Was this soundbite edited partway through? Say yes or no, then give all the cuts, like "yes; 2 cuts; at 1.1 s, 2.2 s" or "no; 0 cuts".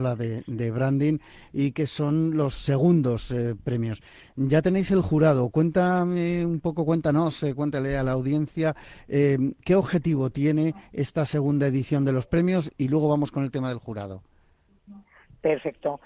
no; 0 cuts